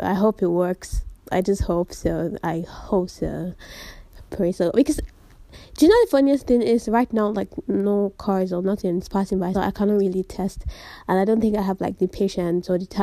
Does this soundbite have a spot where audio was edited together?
yes; 1 cut; at 9.5 s

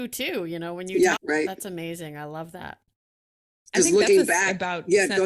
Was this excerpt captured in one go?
no; 1 cut; at 1.2 s

